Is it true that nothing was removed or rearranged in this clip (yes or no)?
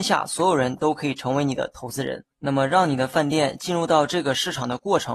no